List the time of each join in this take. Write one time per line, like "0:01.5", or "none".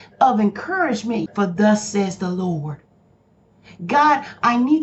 0:01.3